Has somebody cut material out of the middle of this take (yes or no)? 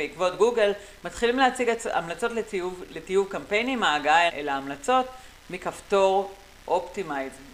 yes